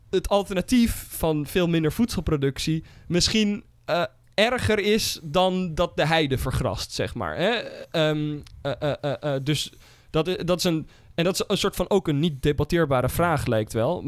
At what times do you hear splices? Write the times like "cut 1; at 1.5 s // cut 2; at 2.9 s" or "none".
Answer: none

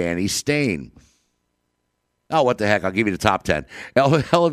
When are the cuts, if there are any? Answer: none

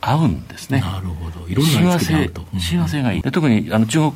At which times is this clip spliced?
cut 1; at 3.2 s

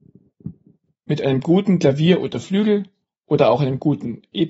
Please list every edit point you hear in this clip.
cut 1; at 0.9 s

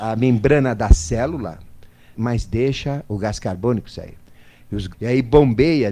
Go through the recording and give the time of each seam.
cut 1; at 2.1 s // cut 2; at 4.9 s

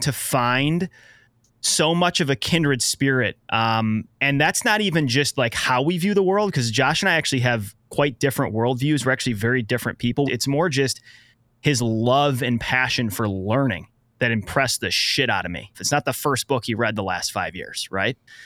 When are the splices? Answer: cut 1; at 10.3 s // cut 2; at 15.7 s

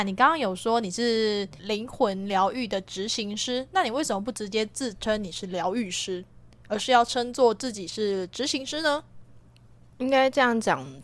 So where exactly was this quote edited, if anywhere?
none

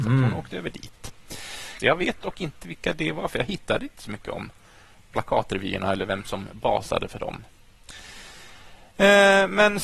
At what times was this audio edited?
cut 1; at 1.8 s

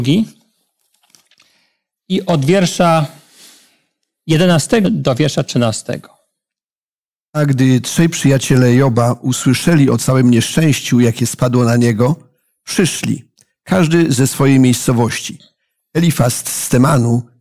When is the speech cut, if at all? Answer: cut 1; at 4.8 s

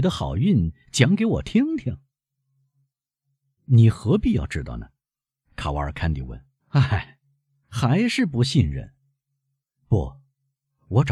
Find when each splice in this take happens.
cut 1; at 6.6 s

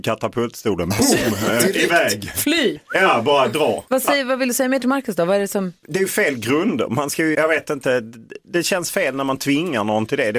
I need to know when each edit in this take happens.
cut 1; at 7.3 s

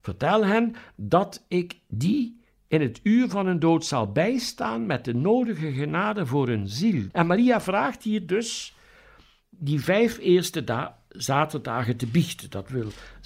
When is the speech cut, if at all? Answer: cut 1; at 7.1 s

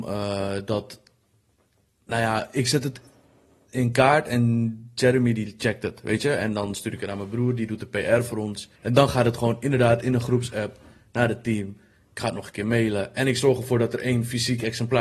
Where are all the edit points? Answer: cut 1; at 8.7 s

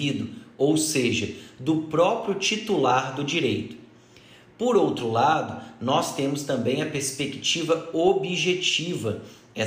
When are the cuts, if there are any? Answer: none

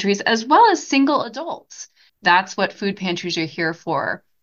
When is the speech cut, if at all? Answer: cut 1; at 2.1 s

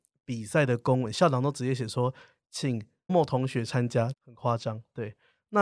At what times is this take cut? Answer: cut 1; at 3.1 s // cut 2; at 4.1 s

